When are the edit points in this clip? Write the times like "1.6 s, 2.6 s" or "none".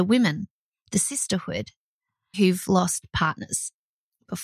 2.3 s